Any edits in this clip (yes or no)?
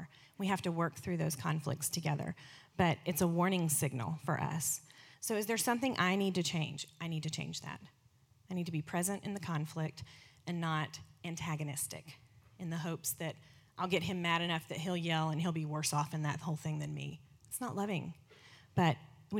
yes